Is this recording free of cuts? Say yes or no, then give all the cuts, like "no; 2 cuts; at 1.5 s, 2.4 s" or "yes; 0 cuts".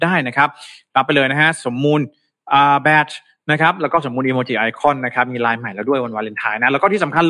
yes; 0 cuts